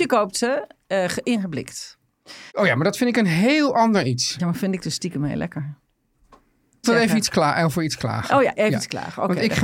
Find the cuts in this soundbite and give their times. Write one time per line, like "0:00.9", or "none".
0:02.5
0:06.8